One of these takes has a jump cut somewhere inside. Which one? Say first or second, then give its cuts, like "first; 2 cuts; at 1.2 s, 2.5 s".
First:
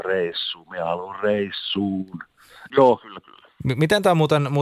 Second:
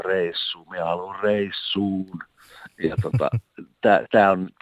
first; 1 cut; at 2.7 s